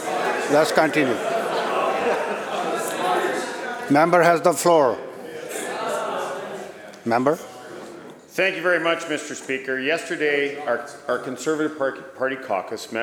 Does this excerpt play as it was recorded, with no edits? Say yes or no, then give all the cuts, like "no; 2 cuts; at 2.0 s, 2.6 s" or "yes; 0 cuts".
yes; 0 cuts